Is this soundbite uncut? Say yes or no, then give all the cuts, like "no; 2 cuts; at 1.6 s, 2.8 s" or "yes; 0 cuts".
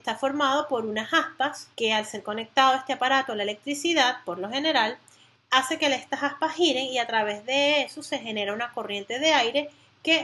no; 2 cuts; at 1.7 s, 5.3 s